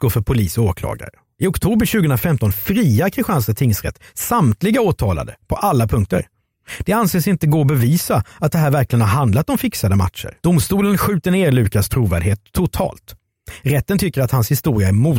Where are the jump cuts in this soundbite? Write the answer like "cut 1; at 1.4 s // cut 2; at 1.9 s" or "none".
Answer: cut 1; at 10.4 s